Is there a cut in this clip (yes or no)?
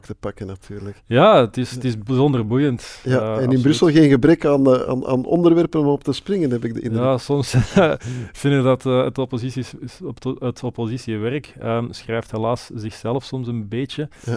no